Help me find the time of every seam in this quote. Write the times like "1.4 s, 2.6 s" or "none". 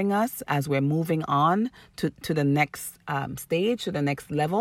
none